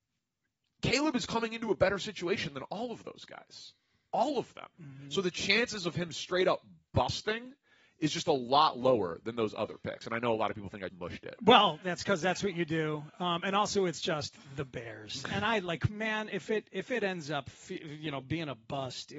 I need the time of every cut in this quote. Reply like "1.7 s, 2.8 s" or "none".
10.9 s